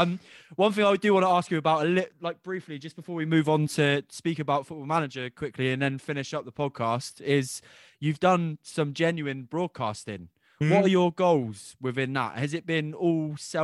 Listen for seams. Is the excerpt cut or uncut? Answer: uncut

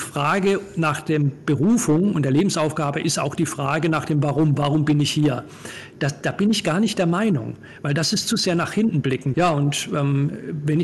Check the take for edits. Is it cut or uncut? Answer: cut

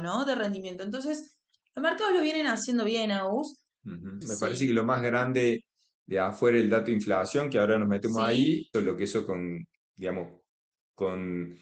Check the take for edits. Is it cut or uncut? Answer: cut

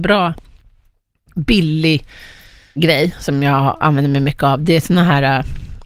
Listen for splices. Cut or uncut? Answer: cut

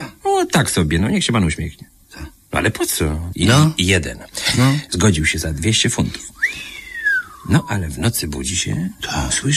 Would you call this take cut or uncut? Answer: cut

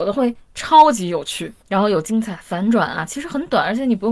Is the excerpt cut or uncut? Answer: cut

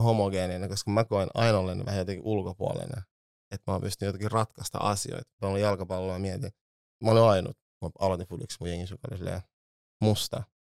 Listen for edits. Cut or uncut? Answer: cut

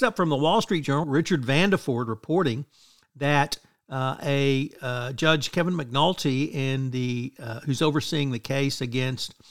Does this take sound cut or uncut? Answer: cut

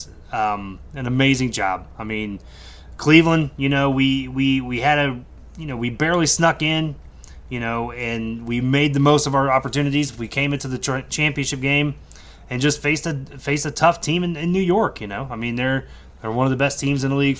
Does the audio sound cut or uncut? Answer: uncut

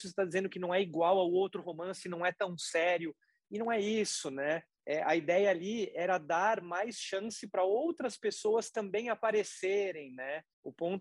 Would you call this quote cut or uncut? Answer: uncut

